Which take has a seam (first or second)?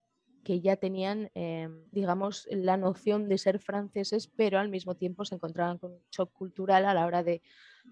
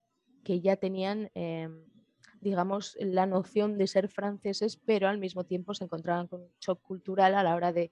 first